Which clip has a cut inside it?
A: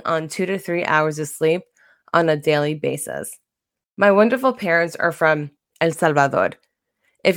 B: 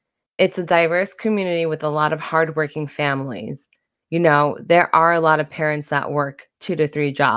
A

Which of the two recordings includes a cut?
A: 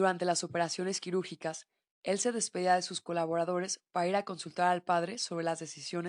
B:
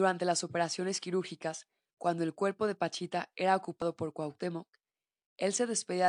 A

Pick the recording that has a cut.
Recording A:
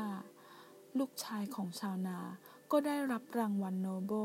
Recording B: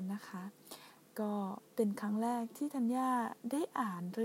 B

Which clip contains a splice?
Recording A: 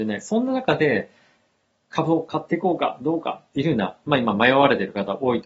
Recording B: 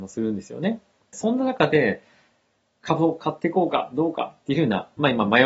B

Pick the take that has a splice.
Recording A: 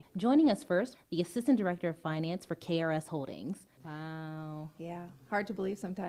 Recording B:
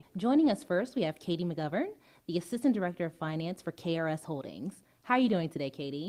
A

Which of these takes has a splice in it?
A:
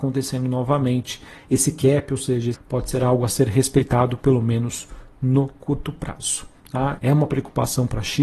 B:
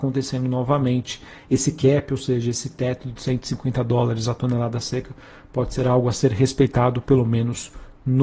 A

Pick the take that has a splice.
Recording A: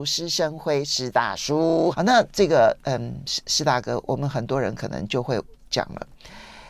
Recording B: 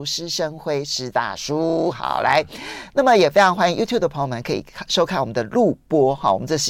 A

